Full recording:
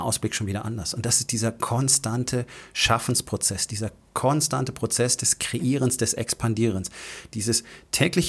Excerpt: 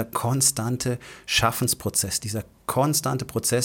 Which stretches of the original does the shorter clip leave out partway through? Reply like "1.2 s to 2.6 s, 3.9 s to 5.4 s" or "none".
none